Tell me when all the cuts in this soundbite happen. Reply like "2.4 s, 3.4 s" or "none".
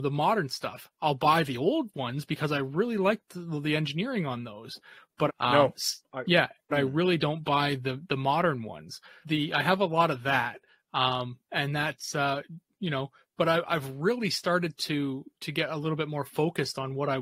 5.3 s, 6.7 s, 9.2 s